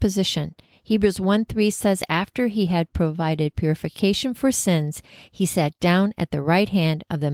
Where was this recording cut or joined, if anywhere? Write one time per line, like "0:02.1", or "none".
none